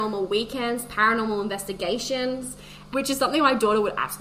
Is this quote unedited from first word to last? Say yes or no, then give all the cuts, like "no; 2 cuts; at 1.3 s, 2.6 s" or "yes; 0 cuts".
no; 1 cut; at 2.9 s